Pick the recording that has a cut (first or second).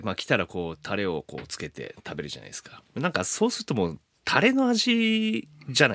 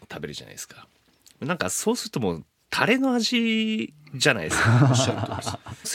first